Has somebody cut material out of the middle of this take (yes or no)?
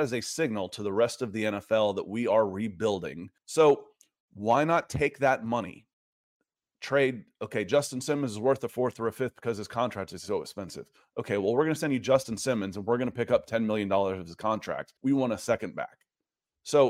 yes